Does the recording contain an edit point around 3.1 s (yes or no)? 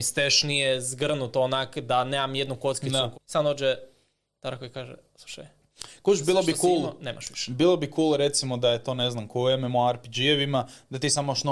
yes